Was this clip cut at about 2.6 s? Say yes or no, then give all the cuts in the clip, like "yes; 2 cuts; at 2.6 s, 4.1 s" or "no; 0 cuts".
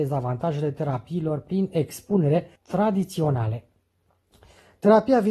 yes; 1 cut; at 2.6 s